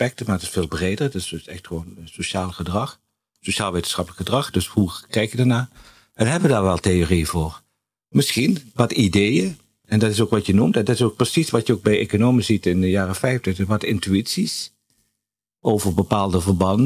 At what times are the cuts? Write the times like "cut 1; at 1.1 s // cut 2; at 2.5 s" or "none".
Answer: none